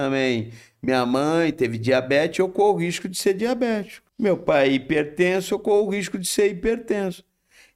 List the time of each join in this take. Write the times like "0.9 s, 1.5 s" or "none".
4.1 s